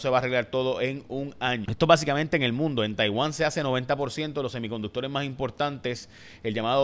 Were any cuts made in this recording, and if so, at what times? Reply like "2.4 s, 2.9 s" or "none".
1.6 s